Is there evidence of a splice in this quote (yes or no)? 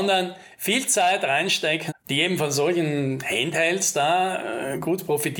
yes